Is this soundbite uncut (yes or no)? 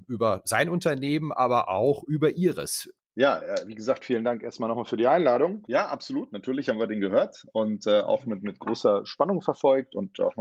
no